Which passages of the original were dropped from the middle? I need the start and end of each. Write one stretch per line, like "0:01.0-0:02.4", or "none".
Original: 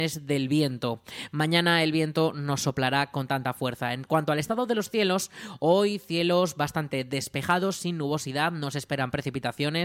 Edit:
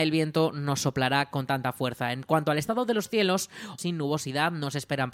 0:05.6-0:07.8